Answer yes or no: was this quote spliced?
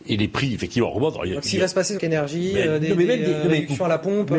yes